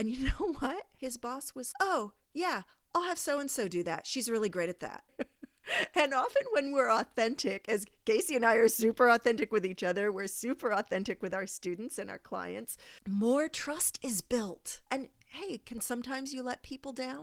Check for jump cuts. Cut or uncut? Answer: cut